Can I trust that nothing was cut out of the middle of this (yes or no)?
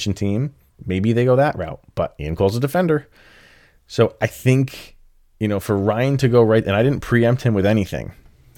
yes